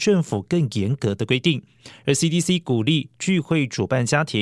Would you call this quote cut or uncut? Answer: uncut